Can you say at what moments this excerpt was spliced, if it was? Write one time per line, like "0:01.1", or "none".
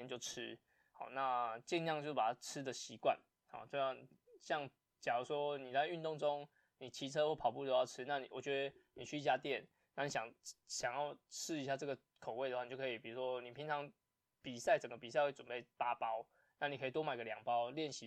none